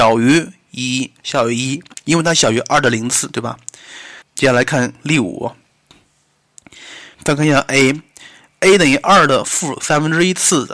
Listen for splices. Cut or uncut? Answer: cut